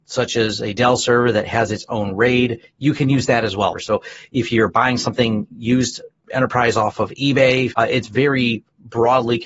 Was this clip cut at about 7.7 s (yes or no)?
yes